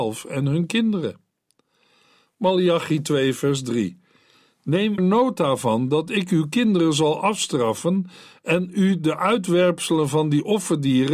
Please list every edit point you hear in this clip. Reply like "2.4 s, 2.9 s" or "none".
5.0 s